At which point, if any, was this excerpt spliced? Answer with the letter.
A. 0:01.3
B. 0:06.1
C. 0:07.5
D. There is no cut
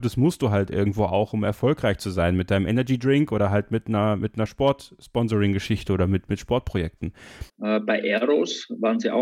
C